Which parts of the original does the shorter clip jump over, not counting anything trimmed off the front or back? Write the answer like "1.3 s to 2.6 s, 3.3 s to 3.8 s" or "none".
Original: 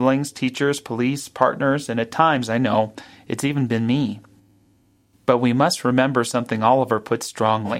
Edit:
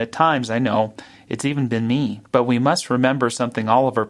4.3 s to 5.2 s